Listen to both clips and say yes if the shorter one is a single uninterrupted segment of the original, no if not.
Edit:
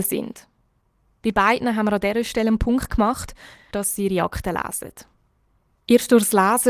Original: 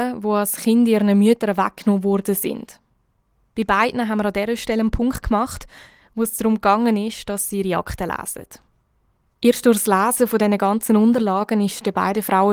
no